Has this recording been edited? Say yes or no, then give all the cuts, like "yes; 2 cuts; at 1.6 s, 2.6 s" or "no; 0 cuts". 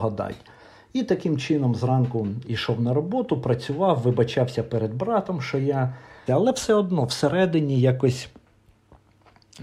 yes; 1 cut; at 6.3 s